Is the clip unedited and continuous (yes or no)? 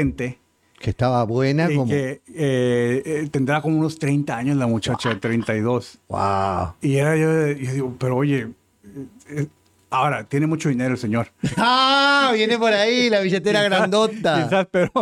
yes